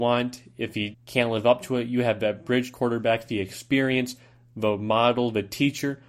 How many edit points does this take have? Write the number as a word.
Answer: one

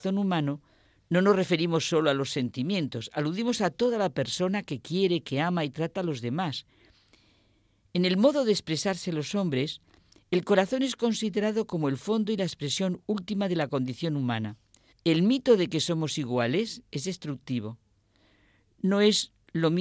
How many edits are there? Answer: one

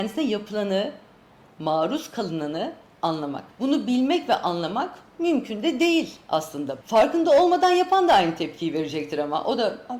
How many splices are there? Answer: two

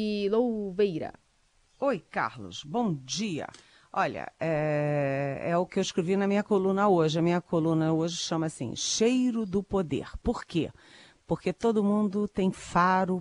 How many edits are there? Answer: zero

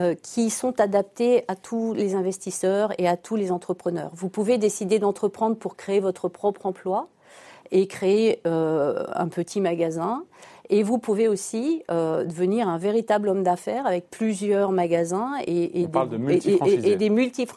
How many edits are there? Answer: zero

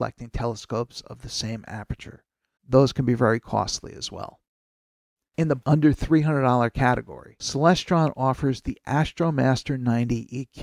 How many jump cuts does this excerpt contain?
one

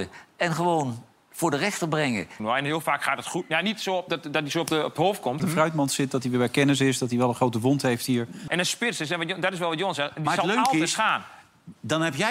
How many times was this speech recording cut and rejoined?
three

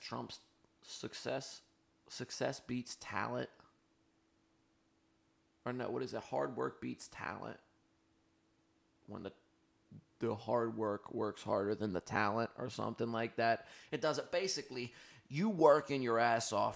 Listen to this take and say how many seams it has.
zero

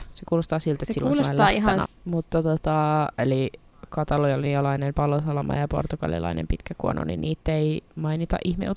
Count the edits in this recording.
two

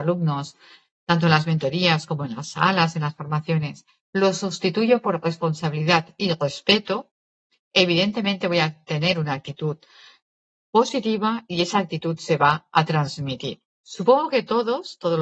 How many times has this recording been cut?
one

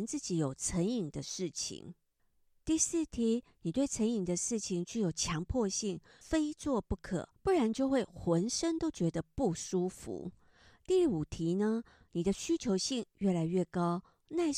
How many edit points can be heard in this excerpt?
one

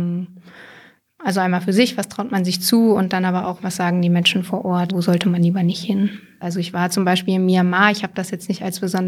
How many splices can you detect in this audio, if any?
two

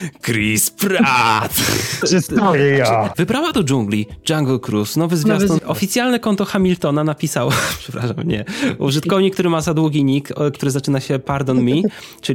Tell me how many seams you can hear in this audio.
three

